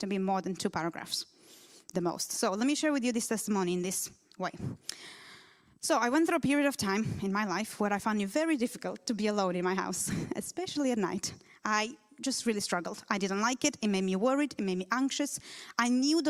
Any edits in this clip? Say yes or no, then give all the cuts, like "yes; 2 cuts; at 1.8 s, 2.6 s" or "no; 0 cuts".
no; 0 cuts